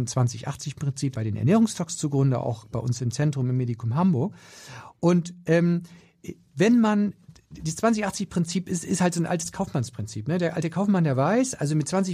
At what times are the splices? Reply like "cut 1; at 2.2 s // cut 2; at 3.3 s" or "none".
cut 1; at 1.1 s